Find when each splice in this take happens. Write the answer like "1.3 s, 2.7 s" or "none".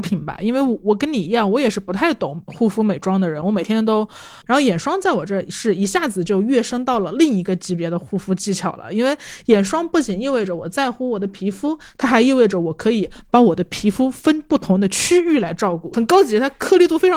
4.4 s, 15.9 s